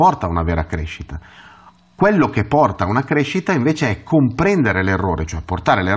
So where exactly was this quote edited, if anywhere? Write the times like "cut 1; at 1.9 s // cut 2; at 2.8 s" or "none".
none